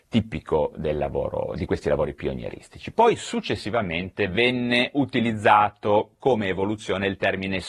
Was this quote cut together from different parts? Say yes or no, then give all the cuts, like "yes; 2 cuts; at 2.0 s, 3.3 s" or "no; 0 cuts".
no; 0 cuts